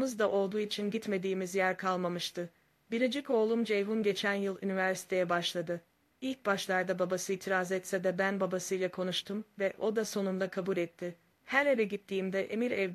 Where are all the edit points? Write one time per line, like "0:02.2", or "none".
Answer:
0:06.1
0:11.3